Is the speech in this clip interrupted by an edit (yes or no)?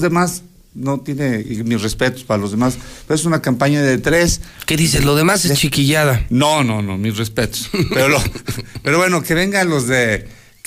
no